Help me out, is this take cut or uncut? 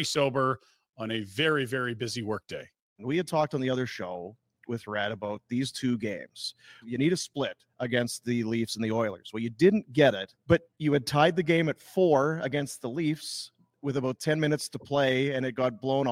uncut